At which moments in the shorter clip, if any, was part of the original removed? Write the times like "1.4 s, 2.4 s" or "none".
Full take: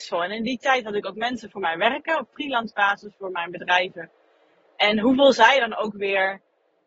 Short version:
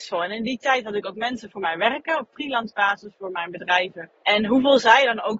4.2 s